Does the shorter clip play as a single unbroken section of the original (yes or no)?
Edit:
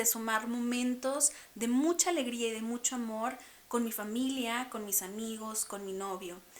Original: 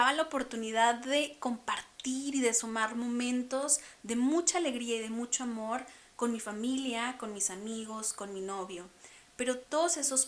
yes